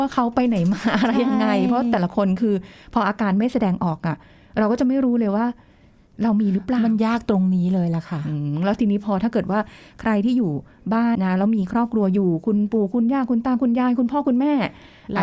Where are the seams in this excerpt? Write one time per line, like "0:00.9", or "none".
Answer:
0:11.1